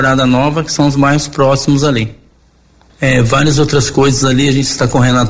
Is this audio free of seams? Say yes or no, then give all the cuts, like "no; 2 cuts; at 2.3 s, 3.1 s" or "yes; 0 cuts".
no; 1 cut; at 2.9 s